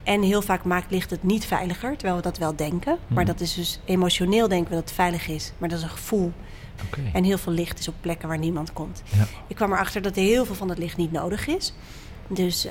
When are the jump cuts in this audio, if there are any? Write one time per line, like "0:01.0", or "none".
0:06.8
0:09.5